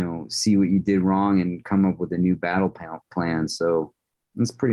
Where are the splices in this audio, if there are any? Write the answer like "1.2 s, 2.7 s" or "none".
none